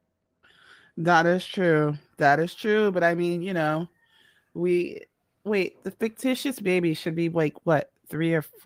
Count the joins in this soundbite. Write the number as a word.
zero